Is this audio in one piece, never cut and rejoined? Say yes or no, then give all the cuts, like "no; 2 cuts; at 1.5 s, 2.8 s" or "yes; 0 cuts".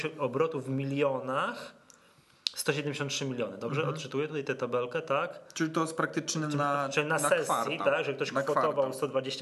yes; 0 cuts